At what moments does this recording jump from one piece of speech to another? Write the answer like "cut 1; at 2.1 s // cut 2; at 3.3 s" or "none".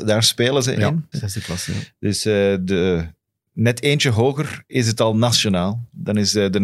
cut 1; at 1.1 s